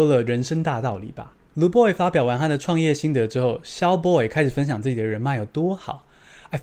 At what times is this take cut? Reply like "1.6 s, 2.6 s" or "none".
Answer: none